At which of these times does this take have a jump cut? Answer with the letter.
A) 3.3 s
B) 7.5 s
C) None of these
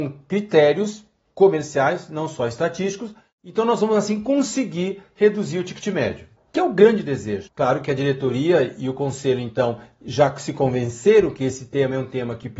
B